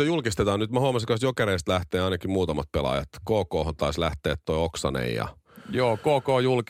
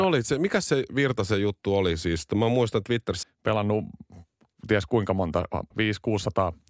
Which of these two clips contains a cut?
second; 2 cuts; at 3.2 s, 5.7 s

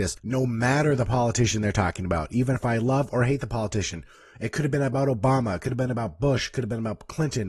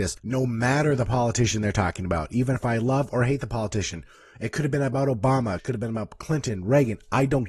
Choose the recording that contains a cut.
second; 1 cut; at 5.6 s

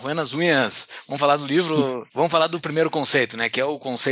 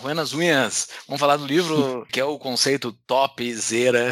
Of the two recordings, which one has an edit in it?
second; 1 cut; at 2.1 s

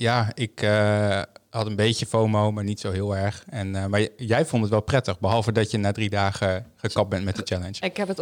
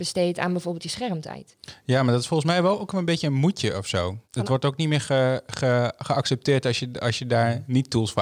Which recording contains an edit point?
second; 1 cut; at 4.2 s

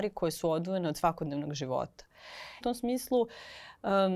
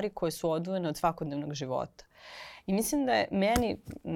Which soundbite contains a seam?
first; 1 cut; at 2.6 s

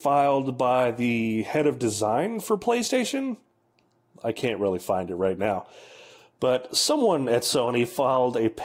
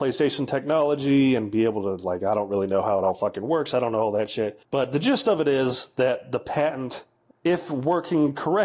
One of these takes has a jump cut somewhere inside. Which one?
second; 2 cuts; at 4.6 s, 7.3 s

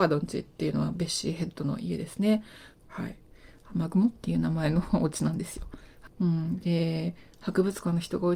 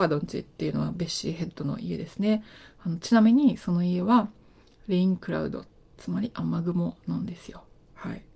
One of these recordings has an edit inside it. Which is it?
first; 2 cuts; at 2.7 s, 6.2 s

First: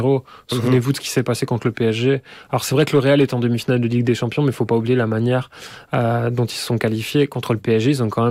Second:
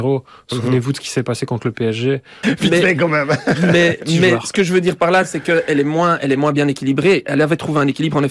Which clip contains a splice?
second; 1 cut; at 2.4 s

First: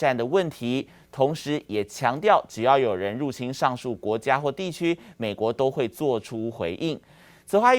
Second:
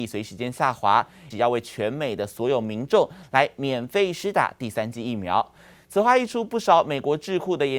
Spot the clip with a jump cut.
second; 2 cuts; at 1.3 s, 5.7 s

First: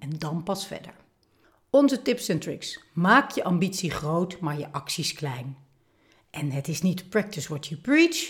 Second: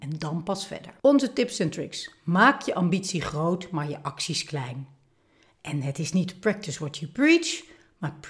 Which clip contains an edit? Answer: second; 1 cut; at 1.0 s

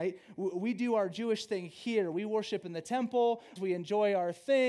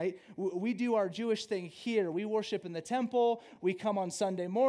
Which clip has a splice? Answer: first; 1 cut; at 3.6 s

